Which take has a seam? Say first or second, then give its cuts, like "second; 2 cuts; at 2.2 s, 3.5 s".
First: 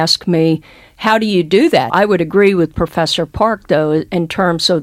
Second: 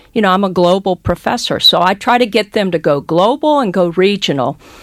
first; 1 cut; at 1.9 s